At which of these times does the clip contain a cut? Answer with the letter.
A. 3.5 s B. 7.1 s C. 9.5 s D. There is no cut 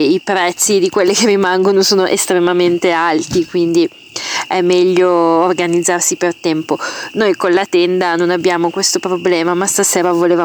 D